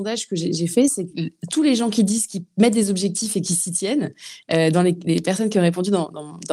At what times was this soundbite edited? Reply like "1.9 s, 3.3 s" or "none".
none